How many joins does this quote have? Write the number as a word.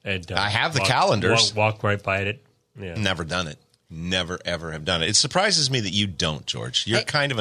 zero